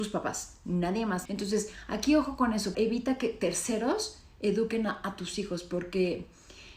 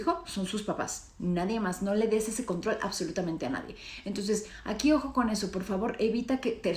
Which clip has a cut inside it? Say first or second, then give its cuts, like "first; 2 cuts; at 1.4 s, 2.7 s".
first; 2 cuts; at 1.3 s, 2.7 s